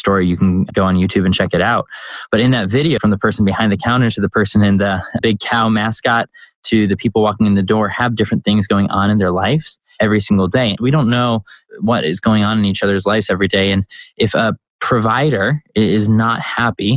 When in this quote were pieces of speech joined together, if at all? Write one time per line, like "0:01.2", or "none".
0:03.0
0:10.8